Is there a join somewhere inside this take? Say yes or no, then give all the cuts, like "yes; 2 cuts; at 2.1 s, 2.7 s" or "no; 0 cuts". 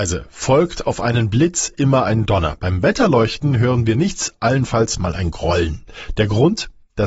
no; 0 cuts